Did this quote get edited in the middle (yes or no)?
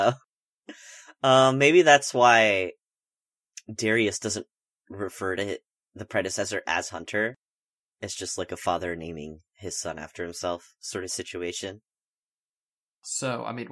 no